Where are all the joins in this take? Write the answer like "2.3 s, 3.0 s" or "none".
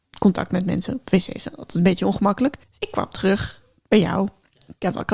2.6 s